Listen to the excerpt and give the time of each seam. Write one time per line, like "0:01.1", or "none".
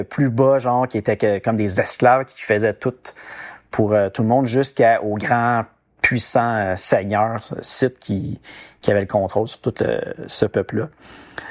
none